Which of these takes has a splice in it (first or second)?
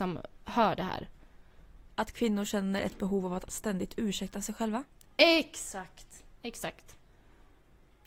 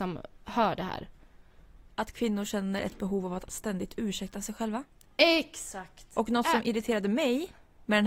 second